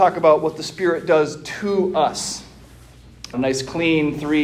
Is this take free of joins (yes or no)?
no